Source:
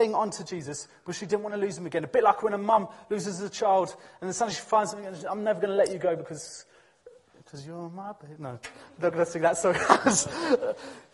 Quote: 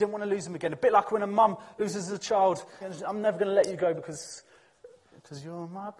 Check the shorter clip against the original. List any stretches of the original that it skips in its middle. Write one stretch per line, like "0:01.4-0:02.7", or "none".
0:04.1-0:05.0